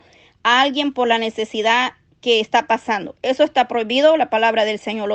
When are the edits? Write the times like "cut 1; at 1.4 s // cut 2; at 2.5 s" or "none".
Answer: none